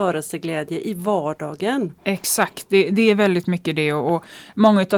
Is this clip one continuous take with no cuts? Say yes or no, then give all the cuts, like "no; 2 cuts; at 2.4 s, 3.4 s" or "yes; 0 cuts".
yes; 0 cuts